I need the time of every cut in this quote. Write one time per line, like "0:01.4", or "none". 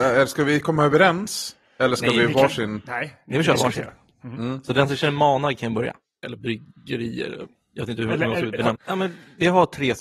0:06.2
0:08.7